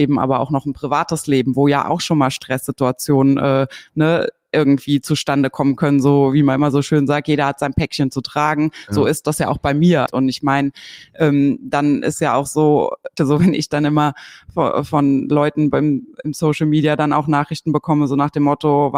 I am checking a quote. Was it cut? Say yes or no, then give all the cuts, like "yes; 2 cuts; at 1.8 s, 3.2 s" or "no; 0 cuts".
yes; 2 cuts; at 10.1 s, 13.2 s